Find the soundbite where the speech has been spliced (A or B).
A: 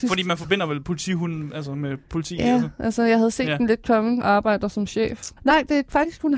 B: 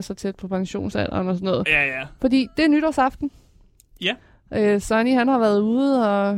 A